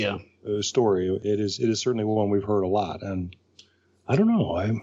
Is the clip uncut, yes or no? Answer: yes